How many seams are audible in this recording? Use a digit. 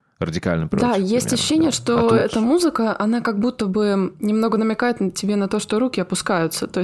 0